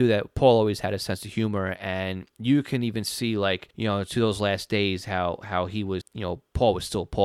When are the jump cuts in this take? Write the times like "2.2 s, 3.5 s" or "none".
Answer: 3.7 s, 6.0 s